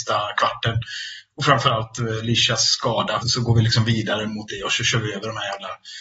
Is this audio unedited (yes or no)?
no